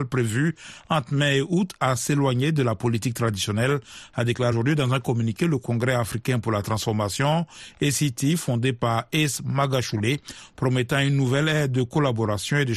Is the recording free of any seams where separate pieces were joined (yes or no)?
no